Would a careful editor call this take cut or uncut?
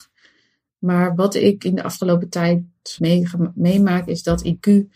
cut